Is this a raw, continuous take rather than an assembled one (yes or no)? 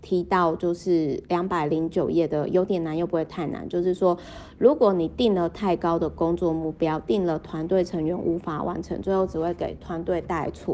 yes